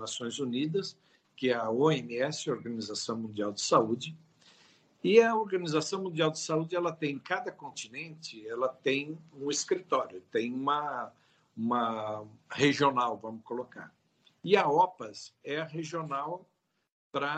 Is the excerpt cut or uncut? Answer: uncut